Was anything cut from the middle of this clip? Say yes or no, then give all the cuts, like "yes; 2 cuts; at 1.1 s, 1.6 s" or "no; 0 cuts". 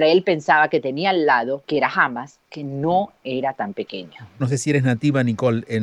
yes; 2 cuts; at 1.6 s, 4.4 s